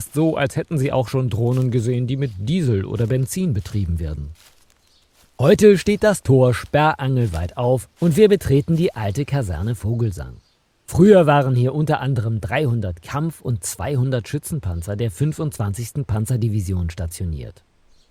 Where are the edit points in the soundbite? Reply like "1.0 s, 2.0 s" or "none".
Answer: none